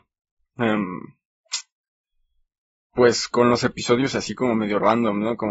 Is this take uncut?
yes; 0 cuts

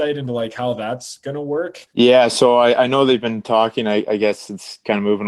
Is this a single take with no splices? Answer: no; 1 cut; at 1.9 s

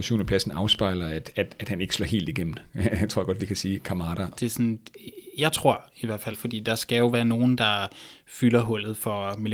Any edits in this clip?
yes; 2 cuts; at 4.3 s, 6.3 s

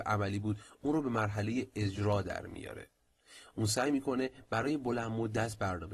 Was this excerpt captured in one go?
yes; 0 cuts

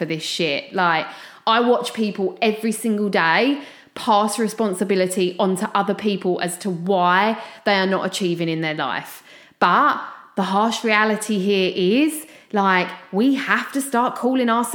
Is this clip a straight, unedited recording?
yes; 0 cuts

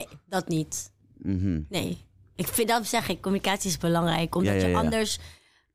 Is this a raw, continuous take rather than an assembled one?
yes; 0 cuts

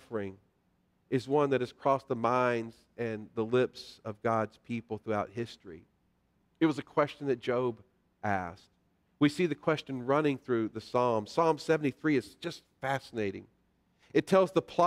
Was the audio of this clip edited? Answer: no; 0 cuts

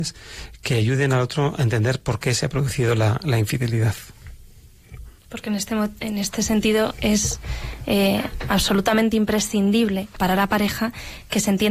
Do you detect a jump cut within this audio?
yes; 2 cuts; at 5.2 s, 10.2 s

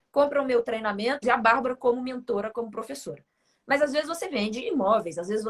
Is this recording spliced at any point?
yes; 1 cut; at 1.2 s

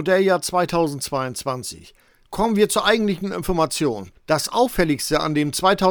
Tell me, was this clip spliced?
no; 0 cuts

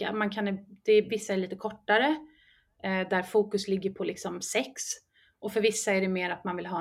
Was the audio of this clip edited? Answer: no; 0 cuts

